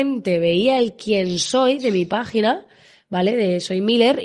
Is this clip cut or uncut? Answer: uncut